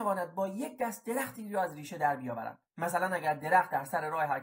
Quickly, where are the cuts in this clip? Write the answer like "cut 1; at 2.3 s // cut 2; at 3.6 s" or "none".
cut 1; at 2.7 s

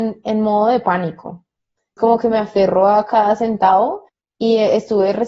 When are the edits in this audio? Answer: cut 1; at 2.0 s

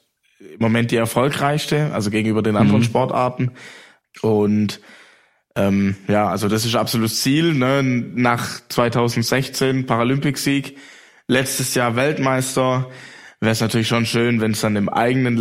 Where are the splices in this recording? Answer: cut 1; at 4.0 s

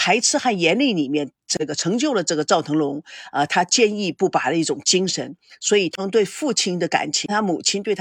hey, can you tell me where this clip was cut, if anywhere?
none

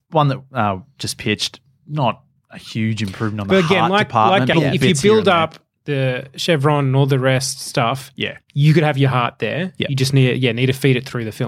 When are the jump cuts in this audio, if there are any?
cut 1; at 4.5 s

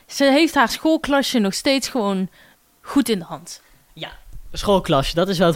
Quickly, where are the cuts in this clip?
none

